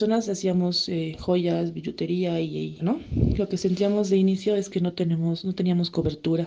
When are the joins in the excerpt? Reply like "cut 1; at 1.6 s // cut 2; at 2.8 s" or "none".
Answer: cut 1; at 2.8 s